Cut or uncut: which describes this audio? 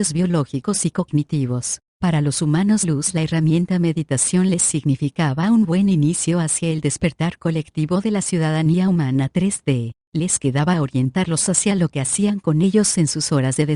cut